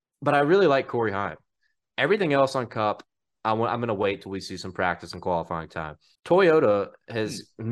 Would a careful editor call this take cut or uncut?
cut